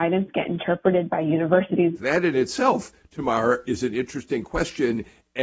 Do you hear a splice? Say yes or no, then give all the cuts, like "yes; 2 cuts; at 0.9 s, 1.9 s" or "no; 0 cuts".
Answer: yes; 1 cut; at 2.0 s